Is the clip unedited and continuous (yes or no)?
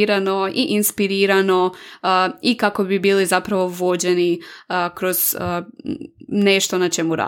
yes